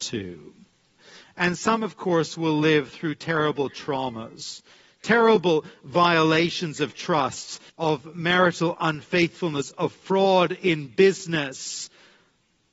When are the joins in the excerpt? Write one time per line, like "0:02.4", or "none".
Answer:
0:07.7